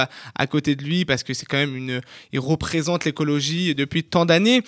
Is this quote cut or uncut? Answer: cut